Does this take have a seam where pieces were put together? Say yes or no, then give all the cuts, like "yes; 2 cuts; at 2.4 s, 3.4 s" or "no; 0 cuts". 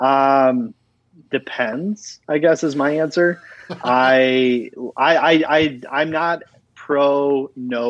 no; 0 cuts